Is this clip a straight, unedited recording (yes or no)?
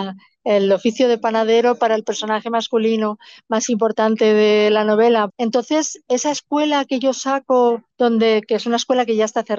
no